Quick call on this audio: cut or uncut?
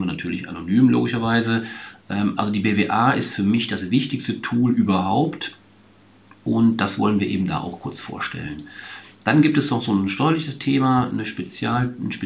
uncut